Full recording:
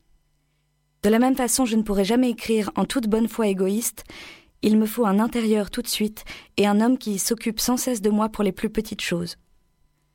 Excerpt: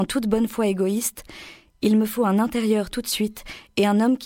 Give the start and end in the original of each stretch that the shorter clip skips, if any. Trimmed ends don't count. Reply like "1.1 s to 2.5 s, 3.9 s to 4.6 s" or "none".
none